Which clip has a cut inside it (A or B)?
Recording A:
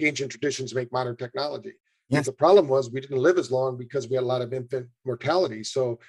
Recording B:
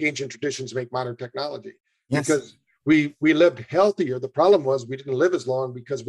A